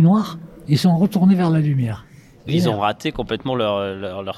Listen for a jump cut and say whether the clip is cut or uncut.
cut